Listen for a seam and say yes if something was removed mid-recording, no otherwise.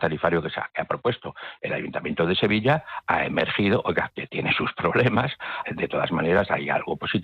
yes